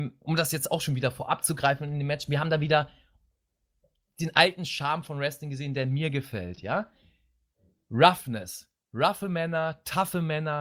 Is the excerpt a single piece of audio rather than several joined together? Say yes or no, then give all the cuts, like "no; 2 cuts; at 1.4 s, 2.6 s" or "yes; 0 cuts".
yes; 0 cuts